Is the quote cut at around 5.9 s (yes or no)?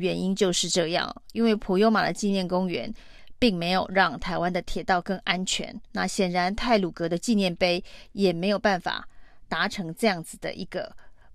yes